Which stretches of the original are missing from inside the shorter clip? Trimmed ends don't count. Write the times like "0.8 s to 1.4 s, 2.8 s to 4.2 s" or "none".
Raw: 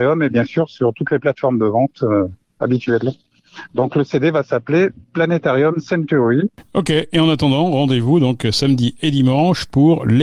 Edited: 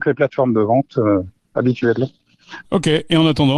3.7 s to 6.7 s